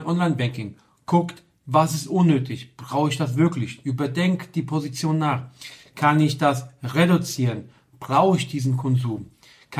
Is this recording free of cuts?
yes; 0 cuts

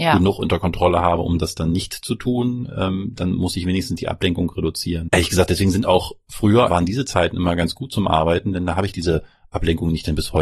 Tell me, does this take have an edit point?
yes; 2 cuts; at 5.1 s, 6.7 s

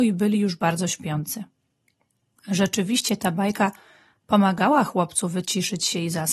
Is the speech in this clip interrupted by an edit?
no; 0 cuts

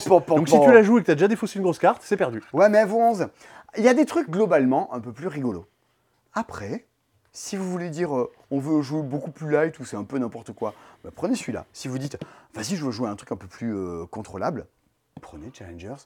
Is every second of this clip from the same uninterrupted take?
no; 1 cut; at 4.3 s

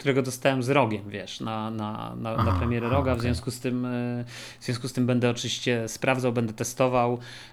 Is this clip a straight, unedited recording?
yes; 0 cuts

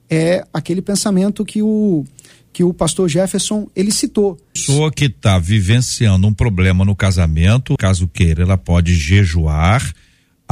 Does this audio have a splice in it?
yes; 2 cuts; at 4.6 s, 7.8 s

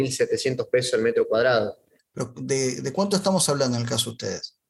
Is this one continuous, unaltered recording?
no; 1 cut; at 2.0 s

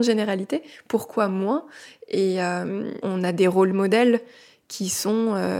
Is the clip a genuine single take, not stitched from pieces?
no; 1 cut; at 3.0 s

